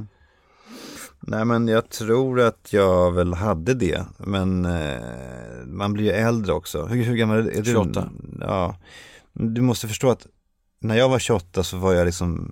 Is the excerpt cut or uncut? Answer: uncut